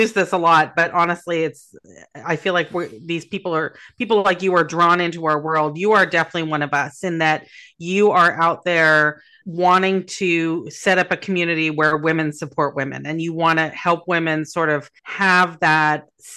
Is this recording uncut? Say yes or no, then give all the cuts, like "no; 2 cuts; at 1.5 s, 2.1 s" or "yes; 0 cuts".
no; 2 cuts; at 9.4 s, 15.0 s